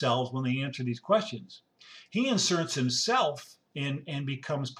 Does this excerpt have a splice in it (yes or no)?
no